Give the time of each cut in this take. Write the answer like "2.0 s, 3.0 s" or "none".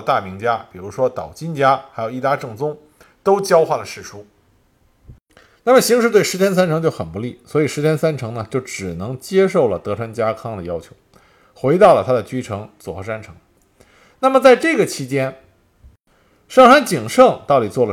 none